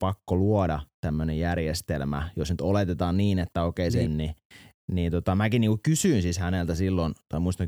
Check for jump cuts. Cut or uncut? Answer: cut